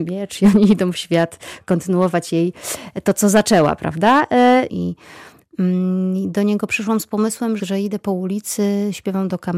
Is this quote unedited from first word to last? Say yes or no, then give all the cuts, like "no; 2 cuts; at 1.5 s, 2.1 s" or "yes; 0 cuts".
no; 2 cuts; at 4.7 s, 7.6 s